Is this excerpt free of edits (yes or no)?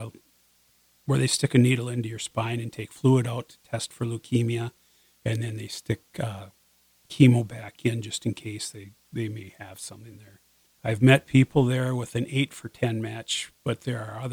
no